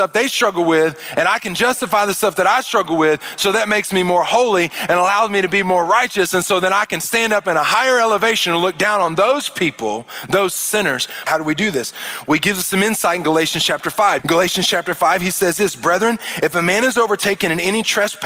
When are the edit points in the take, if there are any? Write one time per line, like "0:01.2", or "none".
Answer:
0:11.3
0:14.2